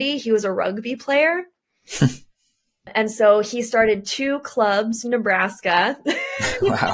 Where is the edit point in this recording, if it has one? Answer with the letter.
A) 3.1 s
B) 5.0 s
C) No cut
B